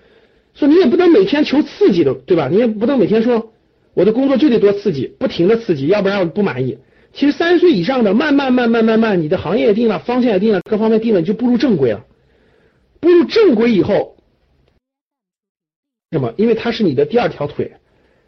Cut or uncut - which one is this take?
uncut